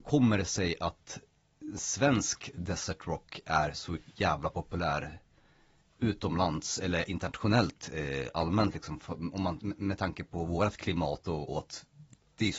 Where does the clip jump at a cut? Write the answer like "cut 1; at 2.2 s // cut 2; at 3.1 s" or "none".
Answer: cut 1; at 11.5 s